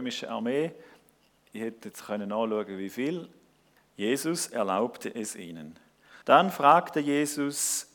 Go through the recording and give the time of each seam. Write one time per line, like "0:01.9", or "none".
0:03.8
0:06.2

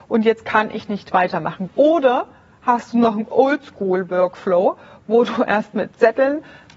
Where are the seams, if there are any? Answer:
0:01.7

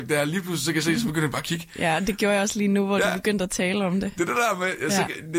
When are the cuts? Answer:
none

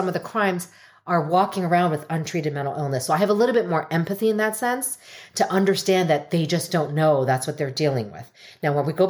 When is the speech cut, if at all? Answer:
none

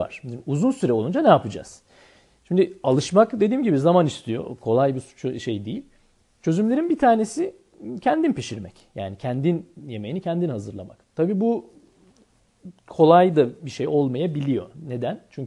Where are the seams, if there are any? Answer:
none

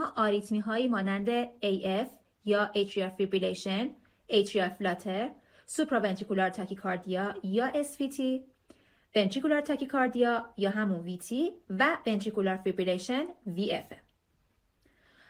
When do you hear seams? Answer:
none

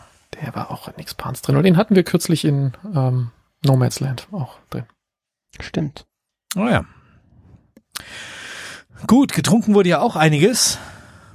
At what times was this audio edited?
none

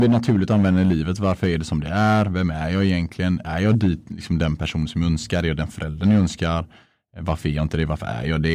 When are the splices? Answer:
none

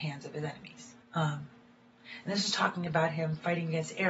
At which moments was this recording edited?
0:01.0

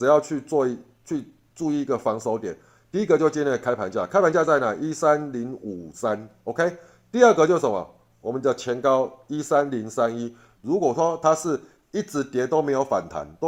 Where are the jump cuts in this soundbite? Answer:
0:10.6

